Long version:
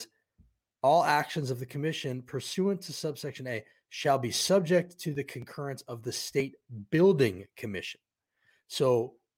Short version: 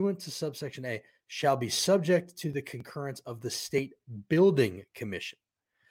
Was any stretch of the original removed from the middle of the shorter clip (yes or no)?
no